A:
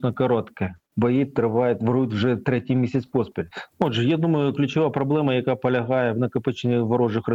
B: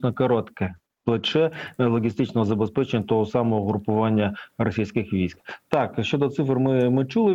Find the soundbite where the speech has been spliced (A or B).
A